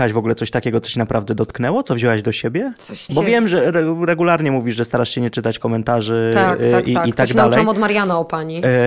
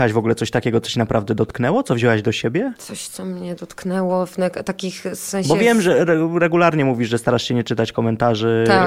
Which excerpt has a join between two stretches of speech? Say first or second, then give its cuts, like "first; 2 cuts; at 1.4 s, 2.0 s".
first; 1 cut; at 3.1 s